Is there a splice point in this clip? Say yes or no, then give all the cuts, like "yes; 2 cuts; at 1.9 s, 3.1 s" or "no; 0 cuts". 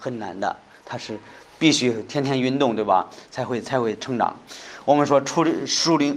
no; 0 cuts